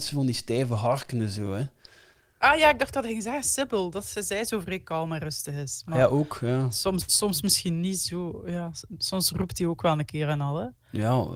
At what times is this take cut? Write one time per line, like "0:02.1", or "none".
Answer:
none